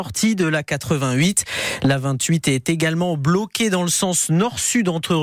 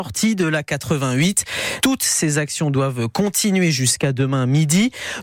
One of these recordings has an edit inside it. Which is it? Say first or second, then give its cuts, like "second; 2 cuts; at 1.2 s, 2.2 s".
second; 1 cut; at 1.8 s